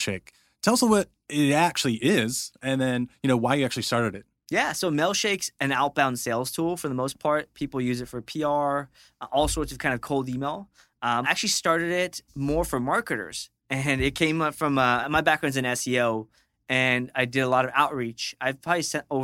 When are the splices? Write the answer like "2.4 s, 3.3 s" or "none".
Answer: 11.2 s, 15.0 s